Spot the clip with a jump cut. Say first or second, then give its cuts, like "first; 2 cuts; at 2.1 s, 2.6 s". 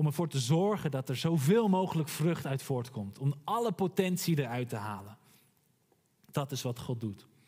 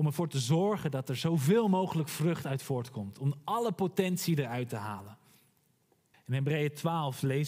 second; 1 cut; at 6.1 s